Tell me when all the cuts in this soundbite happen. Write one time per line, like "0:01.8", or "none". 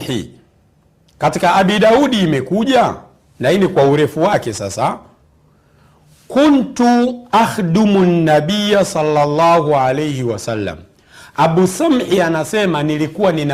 none